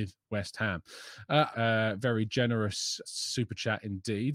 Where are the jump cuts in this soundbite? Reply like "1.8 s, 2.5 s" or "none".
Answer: 1.5 s, 3.0 s